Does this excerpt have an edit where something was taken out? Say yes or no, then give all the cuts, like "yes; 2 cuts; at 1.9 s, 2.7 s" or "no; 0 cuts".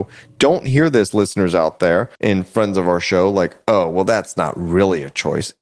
yes; 1 cut; at 2.2 s